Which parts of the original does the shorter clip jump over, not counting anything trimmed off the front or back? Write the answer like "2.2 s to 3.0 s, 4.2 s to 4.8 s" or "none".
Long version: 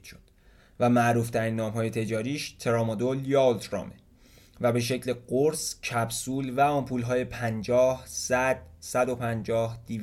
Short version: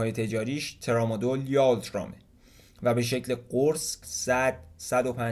5.8 s to 8.1 s